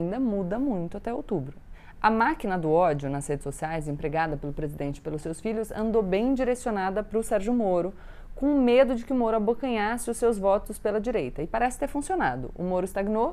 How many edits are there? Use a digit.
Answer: 0